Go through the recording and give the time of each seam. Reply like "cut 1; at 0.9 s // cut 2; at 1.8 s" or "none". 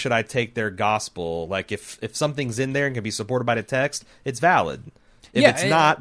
none